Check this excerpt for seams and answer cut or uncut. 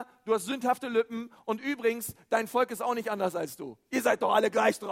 uncut